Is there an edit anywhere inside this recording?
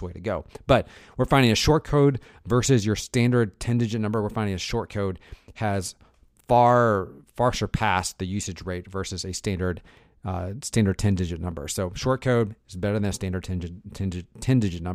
no; 0 cuts

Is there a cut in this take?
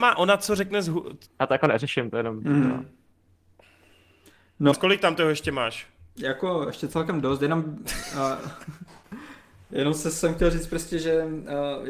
yes; 3 cuts; at 1.2 s, 4.7 s, 9.7 s

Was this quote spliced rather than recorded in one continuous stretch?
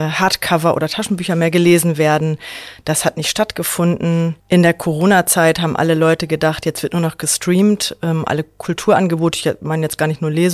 no; 0 cuts

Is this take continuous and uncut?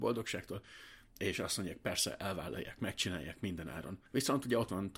yes; 0 cuts

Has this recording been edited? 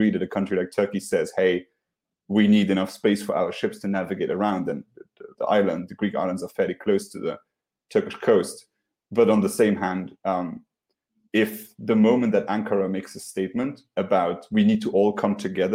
yes; 1 cut; at 5.3 s

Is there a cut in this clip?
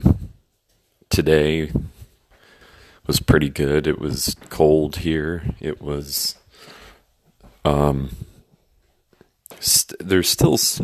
no; 0 cuts

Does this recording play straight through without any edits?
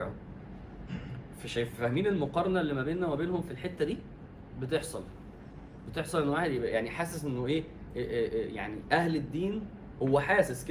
yes; 0 cuts

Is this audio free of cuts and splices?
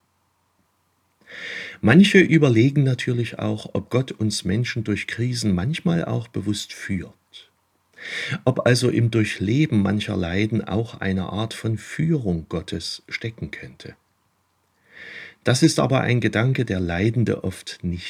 yes; 0 cuts

